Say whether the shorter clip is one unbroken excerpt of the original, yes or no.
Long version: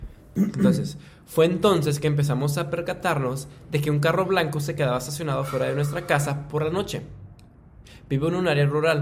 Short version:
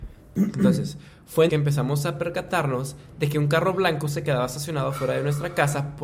no